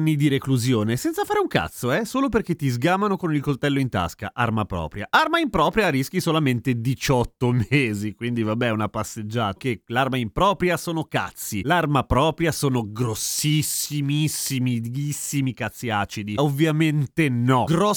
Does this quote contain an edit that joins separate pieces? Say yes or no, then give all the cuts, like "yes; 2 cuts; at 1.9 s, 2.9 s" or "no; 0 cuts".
yes; 2 cuts; at 9.6 s, 16.4 s